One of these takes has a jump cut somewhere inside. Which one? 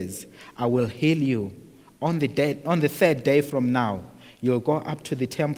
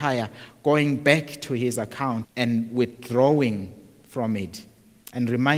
second; 1 cut; at 2.2 s

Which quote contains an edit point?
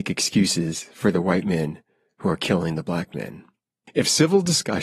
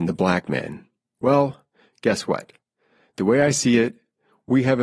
second; 1 cut; at 1.1 s

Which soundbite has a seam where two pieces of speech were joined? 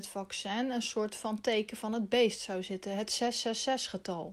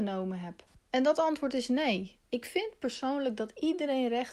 second; 1 cut; at 2.2 s

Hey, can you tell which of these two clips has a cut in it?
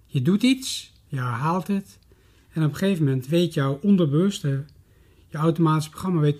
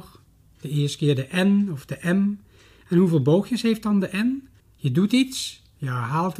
second; 1 cut; at 4.6 s

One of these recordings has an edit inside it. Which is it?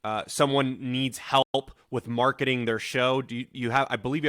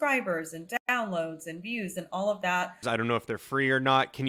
second; 1 cut; at 2.8 s

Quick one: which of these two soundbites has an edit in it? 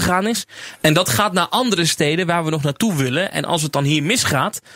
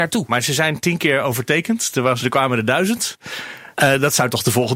second; 2 cuts; at 2.2 s, 3.7 s

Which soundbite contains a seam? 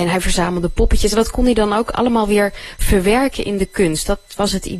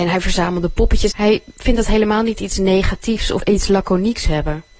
second; 2 cuts; at 1.1 s, 3.4 s

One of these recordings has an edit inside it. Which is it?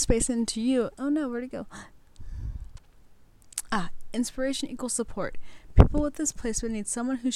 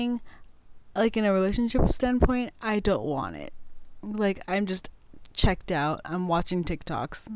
first; 1 cut; at 0.9 s

